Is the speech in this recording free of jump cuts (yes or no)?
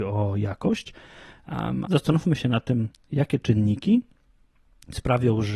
no